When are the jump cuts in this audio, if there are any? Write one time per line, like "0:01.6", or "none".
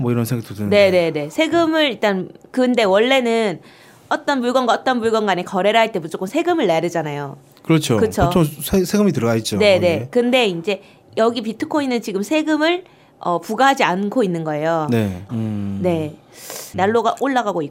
0:15.3
0:16.7

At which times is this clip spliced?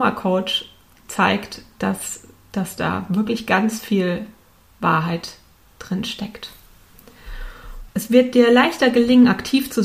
0:07.9

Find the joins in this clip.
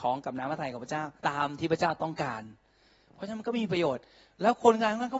0:01.2

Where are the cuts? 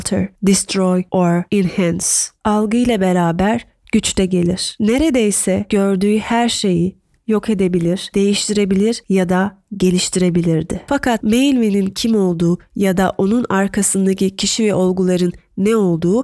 0:10.9

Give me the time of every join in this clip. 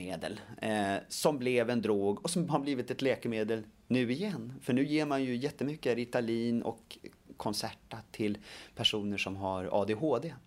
none

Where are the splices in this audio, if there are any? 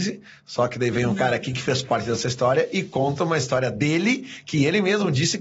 none

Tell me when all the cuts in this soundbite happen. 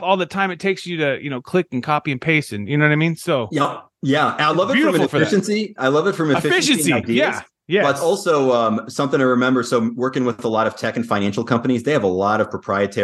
none

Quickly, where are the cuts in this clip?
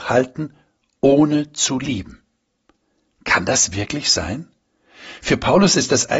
none

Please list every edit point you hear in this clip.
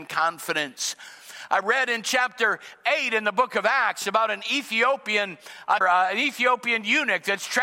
0:05.8

